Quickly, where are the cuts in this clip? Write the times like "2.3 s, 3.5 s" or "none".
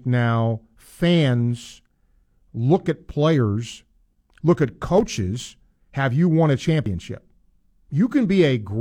5.7 s